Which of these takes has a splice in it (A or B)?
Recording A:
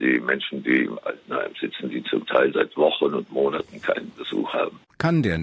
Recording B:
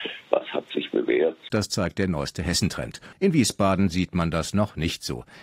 B